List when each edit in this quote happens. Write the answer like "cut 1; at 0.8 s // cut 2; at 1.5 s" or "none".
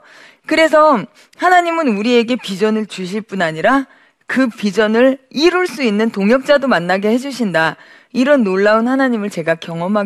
none